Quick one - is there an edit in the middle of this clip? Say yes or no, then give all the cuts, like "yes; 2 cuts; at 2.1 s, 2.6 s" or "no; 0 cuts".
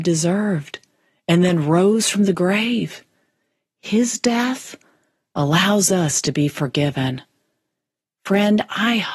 no; 0 cuts